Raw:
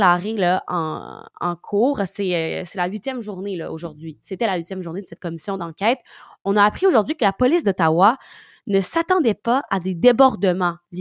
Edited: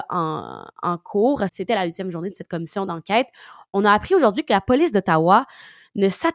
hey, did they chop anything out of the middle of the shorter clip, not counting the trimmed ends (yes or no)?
yes